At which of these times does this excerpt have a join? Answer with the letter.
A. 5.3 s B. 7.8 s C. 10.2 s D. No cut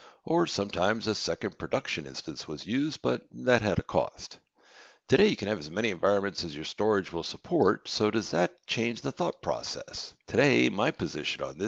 C